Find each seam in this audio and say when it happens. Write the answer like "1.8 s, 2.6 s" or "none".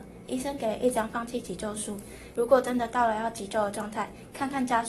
2.3 s